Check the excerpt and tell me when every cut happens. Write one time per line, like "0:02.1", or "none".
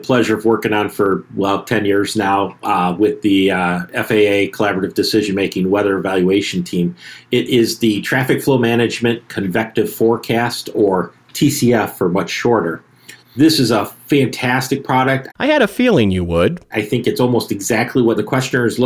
0:13.2
0:15.3
0:16.7

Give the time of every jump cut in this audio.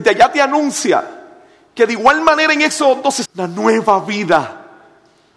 0:03.2

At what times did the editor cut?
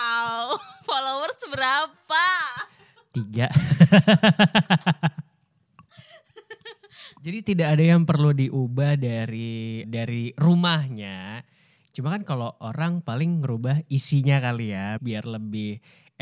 0:09.8
0:15.0

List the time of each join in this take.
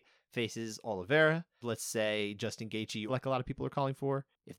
0:01.6
0:03.1

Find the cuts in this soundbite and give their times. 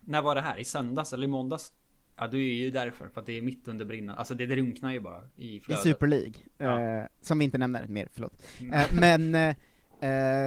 0:02.1

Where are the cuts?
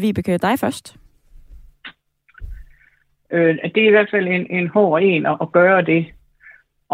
none

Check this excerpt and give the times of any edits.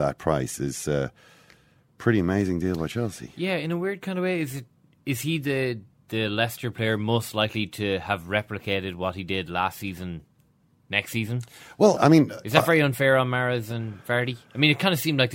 0:12.0

